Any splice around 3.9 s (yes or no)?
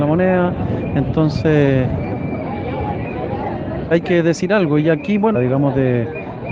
yes